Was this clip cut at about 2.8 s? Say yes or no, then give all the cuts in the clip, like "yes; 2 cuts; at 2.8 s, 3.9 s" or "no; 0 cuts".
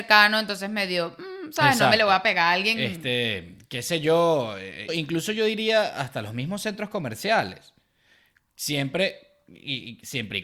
no; 1 cut; at 4.9 s